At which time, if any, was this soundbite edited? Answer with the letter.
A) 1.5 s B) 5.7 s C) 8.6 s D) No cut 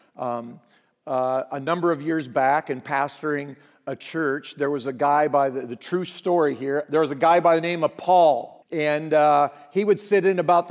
C